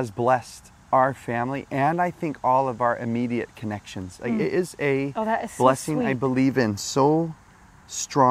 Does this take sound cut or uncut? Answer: uncut